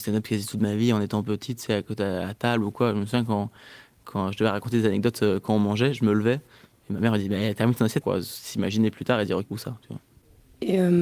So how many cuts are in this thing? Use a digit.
2